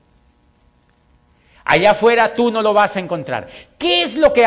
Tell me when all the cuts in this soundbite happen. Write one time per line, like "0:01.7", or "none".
none